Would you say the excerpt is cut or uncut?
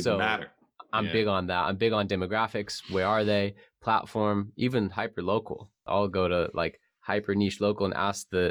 uncut